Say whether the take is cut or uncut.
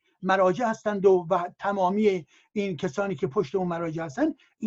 uncut